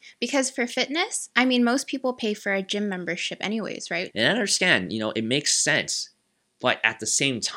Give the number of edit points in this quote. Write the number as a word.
one